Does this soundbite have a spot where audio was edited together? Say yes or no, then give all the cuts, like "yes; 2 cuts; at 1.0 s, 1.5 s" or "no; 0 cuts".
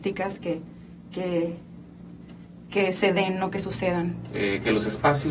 yes; 1 cut; at 4.3 s